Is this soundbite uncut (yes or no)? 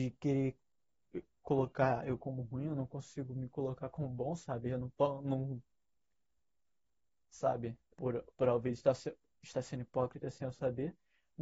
no